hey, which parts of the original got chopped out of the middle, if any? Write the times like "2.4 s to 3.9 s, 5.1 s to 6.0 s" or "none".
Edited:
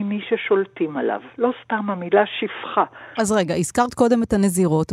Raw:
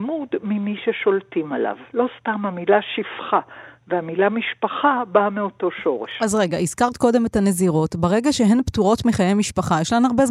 3.7 s to 6.2 s